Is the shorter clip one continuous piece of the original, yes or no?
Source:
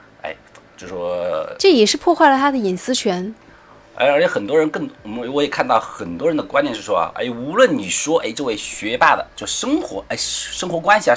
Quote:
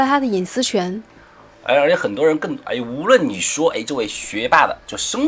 no